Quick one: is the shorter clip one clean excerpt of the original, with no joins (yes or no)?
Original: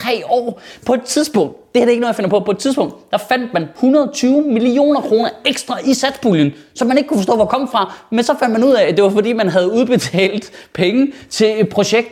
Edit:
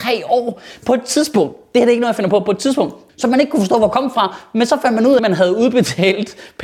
no